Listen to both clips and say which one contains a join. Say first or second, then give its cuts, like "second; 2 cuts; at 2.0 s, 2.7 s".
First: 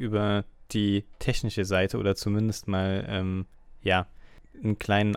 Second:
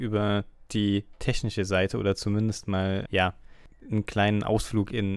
second; 1 cut; at 3.1 s